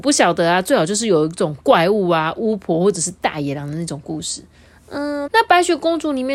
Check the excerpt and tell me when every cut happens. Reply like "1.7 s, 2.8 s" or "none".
5.3 s